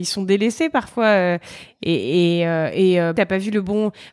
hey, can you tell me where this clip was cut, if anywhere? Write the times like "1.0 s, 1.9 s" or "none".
3.1 s